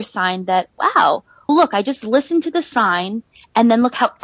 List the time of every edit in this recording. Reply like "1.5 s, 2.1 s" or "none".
1.5 s